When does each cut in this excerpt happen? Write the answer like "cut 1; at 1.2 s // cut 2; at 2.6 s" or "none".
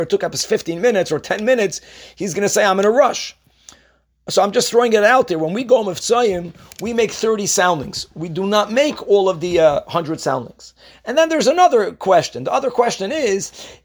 none